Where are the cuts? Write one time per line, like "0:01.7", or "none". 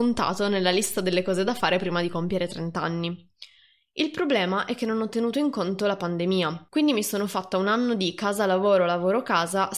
none

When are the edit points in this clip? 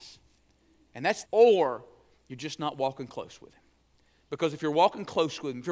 0:01.2

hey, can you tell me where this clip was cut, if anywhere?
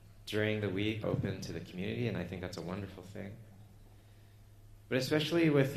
0:01.0

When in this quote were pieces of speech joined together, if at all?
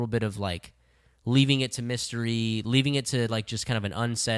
none

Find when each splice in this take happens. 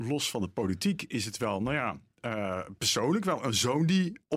none

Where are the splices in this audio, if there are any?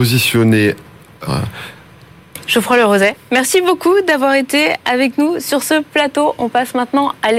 0:01.3

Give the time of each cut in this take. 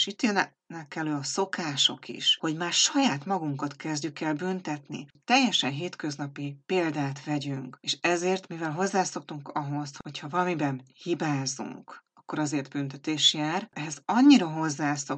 0:07.8

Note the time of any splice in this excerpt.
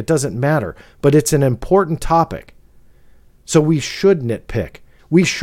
none

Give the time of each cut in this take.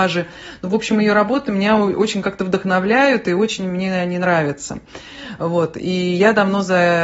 none

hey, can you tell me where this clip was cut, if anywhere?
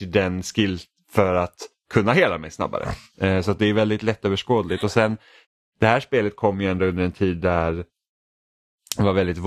none

